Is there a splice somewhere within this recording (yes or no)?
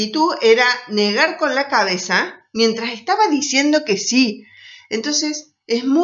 no